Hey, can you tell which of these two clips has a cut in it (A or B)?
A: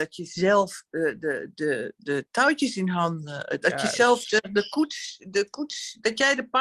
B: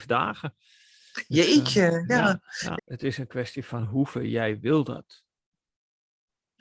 B